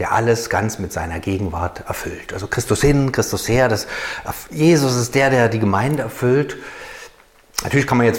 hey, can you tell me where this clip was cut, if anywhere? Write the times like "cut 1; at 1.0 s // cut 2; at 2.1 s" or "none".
none